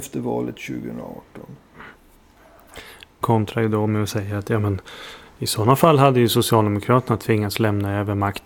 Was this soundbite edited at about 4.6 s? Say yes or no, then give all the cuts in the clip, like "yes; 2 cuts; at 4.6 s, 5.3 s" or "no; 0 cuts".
no; 1 cut; at 3.2 s